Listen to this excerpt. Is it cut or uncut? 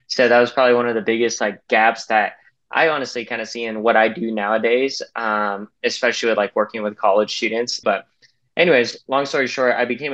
cut